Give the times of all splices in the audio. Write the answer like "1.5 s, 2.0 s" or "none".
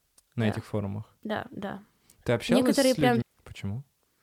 3.2 s